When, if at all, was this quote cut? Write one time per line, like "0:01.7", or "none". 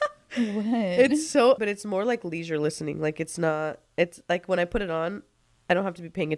0:01.6